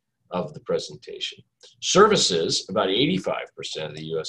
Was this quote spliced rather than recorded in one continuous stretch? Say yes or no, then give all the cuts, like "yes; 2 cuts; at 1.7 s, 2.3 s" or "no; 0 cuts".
no; 0 cuts